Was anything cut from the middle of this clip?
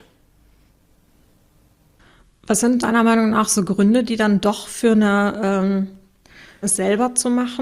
yes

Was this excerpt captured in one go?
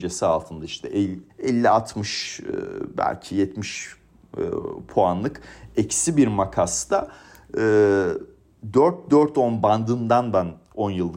no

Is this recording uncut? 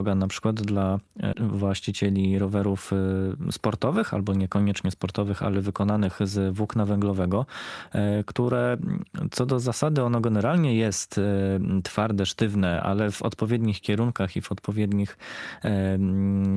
no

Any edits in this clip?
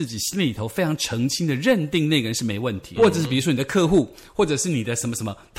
yes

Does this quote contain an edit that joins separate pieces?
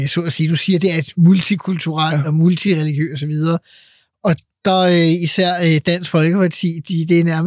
no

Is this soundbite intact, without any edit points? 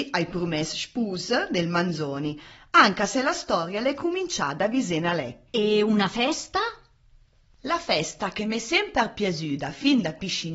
no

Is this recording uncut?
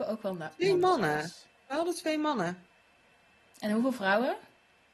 yes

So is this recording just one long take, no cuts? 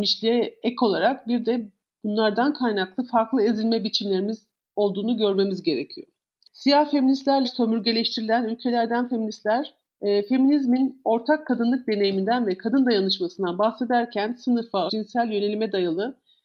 no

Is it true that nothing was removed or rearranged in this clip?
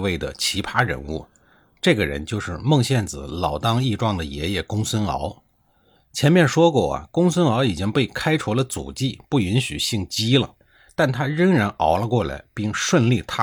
yes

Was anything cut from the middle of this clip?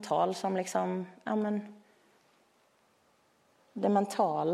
no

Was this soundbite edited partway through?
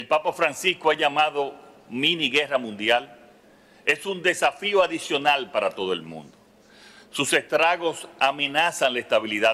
no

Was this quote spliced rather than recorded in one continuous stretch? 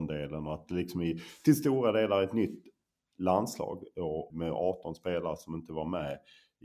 yes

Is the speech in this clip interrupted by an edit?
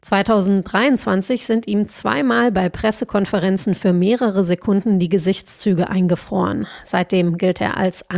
no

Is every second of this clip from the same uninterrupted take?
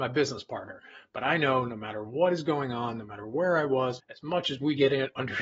no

